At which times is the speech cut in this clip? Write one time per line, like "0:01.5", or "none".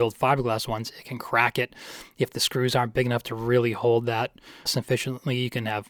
0:04.7